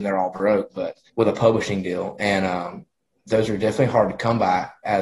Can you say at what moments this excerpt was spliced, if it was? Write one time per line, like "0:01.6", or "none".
0:01.1